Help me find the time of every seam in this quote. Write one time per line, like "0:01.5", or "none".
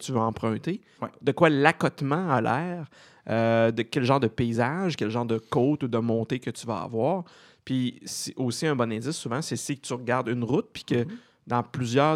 0:00.9